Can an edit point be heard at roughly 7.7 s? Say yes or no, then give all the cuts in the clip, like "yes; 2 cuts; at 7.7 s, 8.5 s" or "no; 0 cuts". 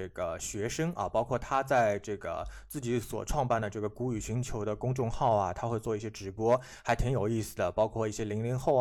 no; 0 cuts